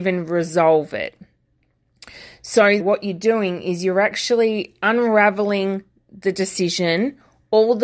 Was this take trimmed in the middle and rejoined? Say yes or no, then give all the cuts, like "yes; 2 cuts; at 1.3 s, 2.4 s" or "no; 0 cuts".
yes; 1 cut; at 2.8 s